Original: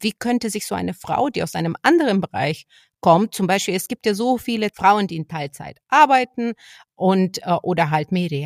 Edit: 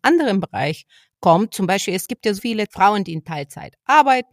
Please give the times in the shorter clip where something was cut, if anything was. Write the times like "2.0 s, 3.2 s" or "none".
2.4 s